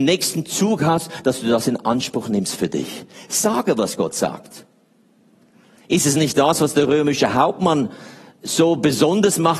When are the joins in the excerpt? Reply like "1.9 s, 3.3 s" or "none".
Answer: none